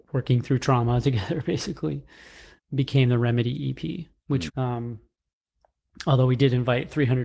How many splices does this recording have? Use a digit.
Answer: 2